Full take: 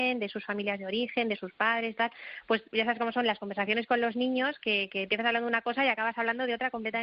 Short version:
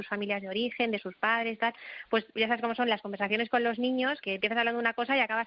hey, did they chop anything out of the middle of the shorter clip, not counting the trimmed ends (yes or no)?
yes